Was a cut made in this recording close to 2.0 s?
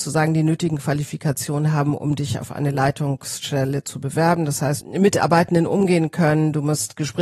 no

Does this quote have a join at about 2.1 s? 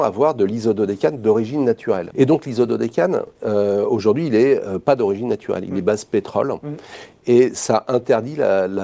yes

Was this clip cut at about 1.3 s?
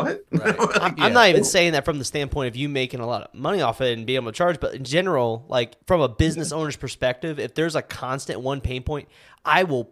no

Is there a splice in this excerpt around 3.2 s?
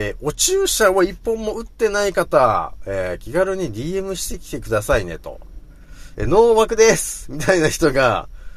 no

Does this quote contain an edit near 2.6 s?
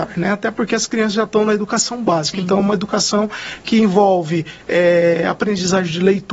no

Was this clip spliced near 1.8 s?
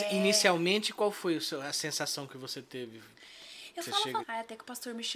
no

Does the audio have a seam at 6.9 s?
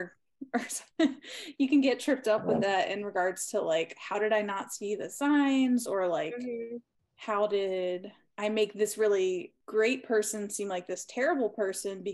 no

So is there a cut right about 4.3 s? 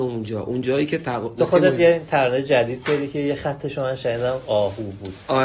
no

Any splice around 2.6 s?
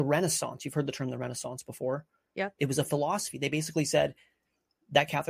yes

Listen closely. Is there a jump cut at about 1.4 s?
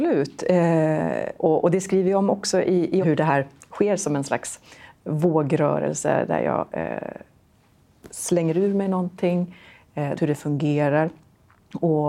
yes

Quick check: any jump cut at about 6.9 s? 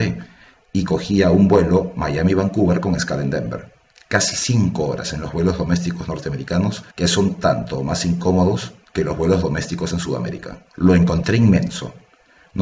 yes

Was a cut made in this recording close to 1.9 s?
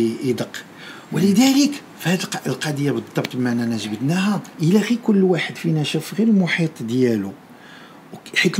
yes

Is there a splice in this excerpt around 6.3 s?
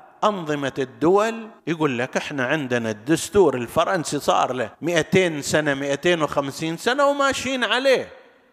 no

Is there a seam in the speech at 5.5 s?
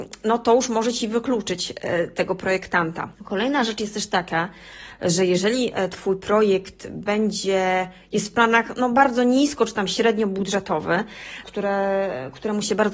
no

